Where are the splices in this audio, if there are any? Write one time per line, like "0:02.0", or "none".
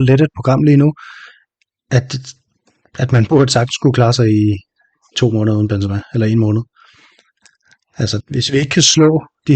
0:08.2